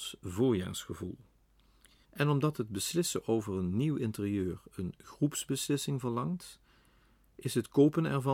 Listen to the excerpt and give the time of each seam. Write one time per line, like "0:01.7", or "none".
0:02.0